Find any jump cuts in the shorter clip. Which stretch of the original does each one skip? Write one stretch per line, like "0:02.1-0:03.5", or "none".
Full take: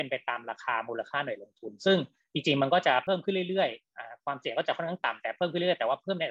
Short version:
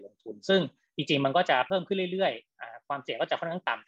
none